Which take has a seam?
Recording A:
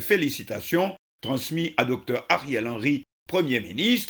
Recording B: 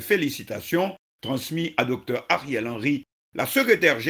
B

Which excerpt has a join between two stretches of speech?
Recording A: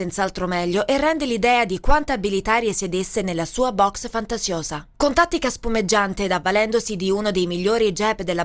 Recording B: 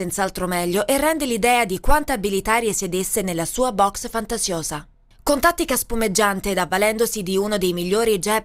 A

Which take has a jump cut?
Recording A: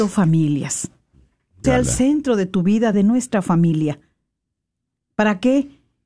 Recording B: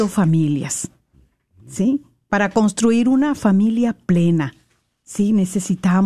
A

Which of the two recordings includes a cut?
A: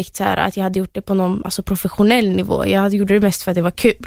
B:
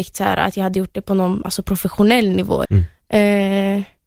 B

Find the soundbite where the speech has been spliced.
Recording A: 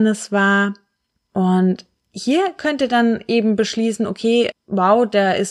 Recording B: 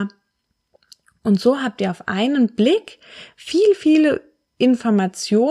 A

